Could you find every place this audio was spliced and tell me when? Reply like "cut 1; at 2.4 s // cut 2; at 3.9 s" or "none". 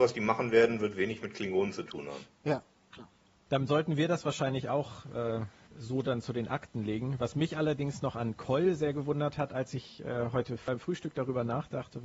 none